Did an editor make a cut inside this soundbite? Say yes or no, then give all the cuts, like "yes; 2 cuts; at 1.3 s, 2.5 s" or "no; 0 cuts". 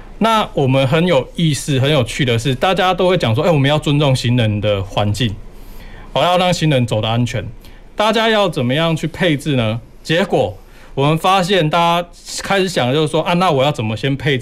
yes; 1 cut; at 7.9 s